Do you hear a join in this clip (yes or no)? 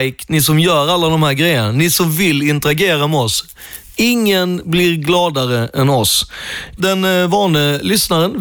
yes